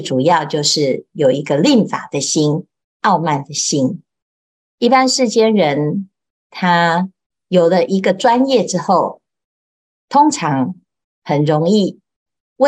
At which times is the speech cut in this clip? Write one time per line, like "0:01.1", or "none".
none